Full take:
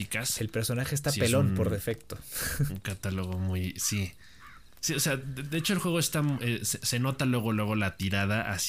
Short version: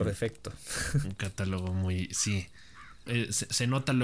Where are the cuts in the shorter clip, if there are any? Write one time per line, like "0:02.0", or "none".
0:03.1